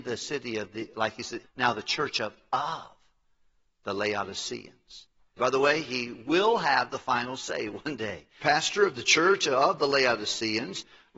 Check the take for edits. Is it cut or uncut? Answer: cut